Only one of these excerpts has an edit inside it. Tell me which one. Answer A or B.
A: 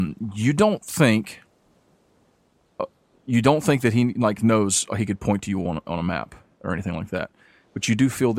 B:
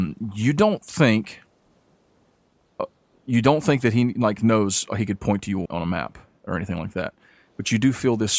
B